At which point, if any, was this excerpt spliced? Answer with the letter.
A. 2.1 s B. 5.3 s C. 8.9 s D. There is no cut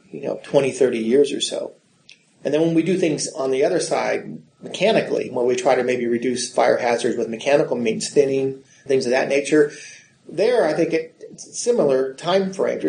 C